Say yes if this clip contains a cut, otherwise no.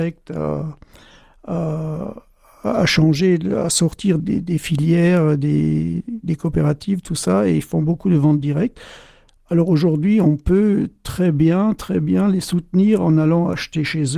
yes